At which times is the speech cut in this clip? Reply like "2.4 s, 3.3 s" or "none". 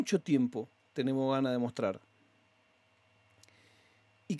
none

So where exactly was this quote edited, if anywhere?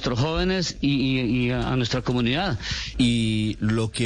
2.9 s

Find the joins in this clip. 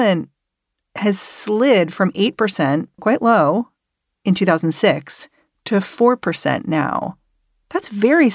3.0 s

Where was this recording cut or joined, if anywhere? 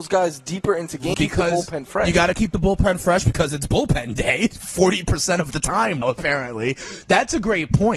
1.1 s, 6.0 s

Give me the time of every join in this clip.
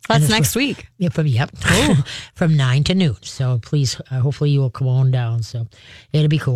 none

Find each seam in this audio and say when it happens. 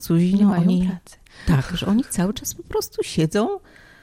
none

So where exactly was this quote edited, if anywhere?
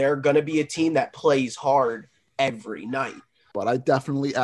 3.5 s

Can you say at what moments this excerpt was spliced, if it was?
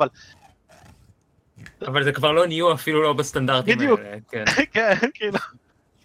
none

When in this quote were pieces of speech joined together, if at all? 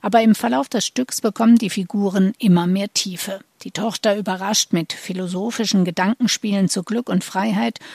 none

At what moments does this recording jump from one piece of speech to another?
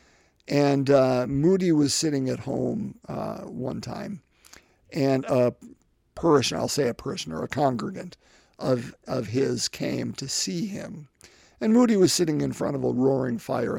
none

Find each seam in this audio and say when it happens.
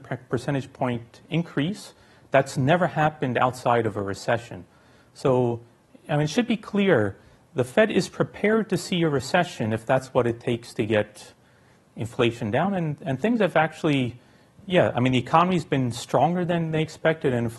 none

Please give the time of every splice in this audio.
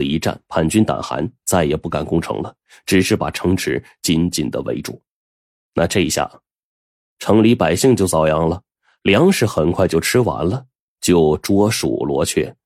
none

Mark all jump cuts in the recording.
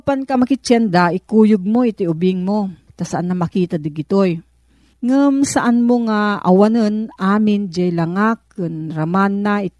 2.9 s, 4.9 s

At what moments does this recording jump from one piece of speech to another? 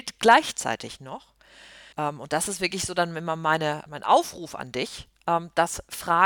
1.9 s, 3.9 s

